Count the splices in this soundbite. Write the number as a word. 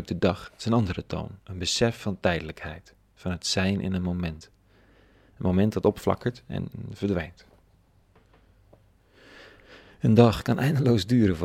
one